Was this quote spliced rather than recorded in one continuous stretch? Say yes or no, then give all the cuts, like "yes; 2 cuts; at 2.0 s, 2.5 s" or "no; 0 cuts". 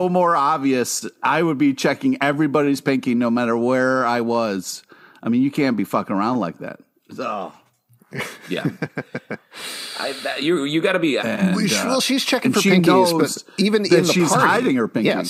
yes; 1 cut; at 11.2 s